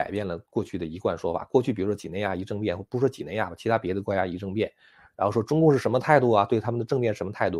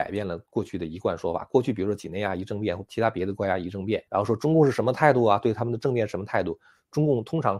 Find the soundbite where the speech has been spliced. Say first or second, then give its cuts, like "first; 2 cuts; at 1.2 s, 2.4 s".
second; 2 cuts; at 2.9 s, 4.1 s